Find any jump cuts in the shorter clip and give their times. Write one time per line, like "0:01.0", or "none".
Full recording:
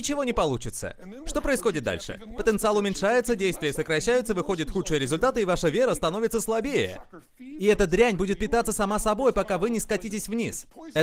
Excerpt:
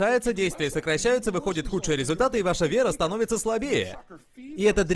none